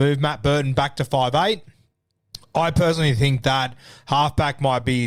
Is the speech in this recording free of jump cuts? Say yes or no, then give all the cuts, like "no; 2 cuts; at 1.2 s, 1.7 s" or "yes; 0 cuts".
yes; 0 cuts